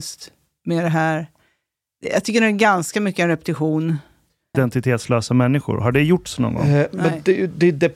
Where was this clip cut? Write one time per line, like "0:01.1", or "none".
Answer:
0:04.5

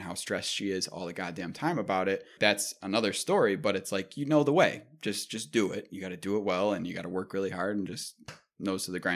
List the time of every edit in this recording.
0:02.4

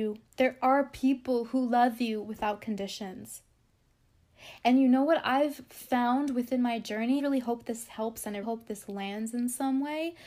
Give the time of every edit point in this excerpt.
0:07.2
0:08.4

